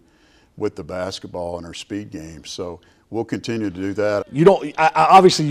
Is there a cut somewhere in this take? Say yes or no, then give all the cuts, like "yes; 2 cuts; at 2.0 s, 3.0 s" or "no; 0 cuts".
yes; 1 cut; at 4.2 s